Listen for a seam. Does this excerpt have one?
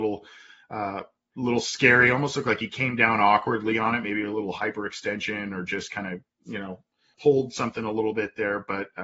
yes; 1 cut; at 7.1 s

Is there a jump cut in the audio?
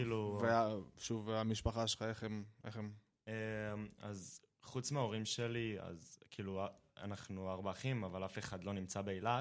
no; 0 cuts

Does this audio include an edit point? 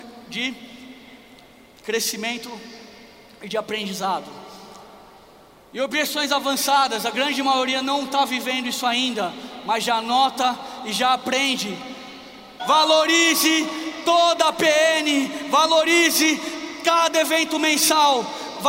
yes; 1 cut; at 12.6 s

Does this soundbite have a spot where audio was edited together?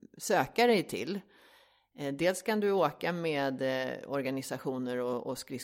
no; 0 cuts

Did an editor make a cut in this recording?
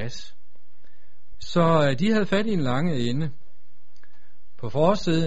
yes; 1 cut; at 1.3 s

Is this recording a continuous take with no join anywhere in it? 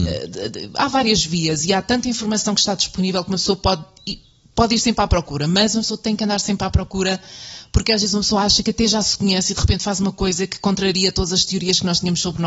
yes; 0 cuts

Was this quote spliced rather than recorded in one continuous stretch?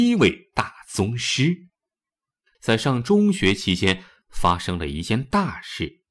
yes; 1 cut; at 2.5 s

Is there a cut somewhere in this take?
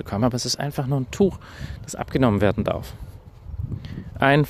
no; 0 cuts

